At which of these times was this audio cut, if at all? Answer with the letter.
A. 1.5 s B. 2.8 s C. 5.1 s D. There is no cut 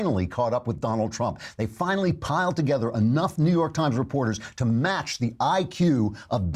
D